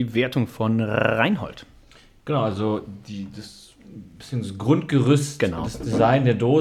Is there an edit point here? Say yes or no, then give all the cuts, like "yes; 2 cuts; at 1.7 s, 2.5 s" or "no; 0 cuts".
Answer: no; 0 cuts